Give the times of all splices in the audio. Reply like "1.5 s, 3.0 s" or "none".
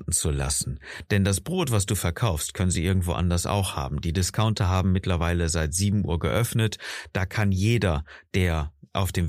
none